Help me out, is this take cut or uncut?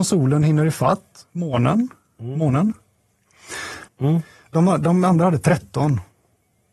cut